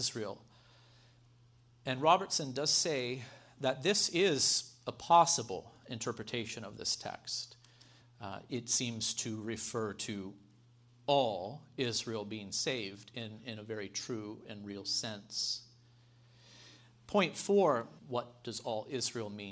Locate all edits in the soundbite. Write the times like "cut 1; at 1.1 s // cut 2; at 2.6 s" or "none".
cut 1; at 8.0 s // cut 2; at 18.0 s